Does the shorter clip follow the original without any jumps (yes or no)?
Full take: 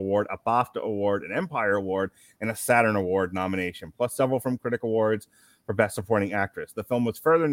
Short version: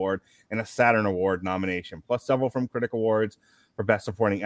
yes